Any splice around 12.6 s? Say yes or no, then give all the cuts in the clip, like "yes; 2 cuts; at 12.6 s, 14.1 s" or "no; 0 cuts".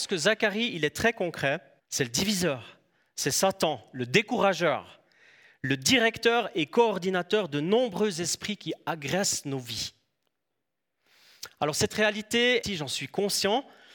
yes; 2 cuts; at 1.8 s, 12.6 s